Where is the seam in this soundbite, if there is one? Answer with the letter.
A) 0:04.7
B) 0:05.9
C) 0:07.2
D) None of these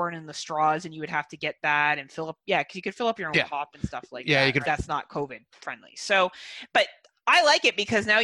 A